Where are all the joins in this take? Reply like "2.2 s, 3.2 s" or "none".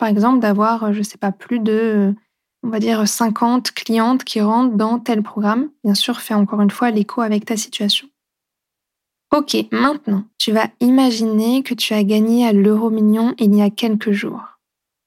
10.3 s